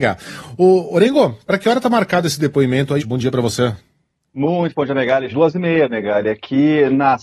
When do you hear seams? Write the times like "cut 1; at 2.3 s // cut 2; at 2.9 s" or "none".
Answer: cut 1; at 3.0 s // cut 2; at 5.3 s